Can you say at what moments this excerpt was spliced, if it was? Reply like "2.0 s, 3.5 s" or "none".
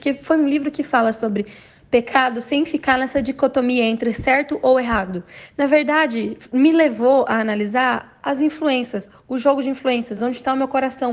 none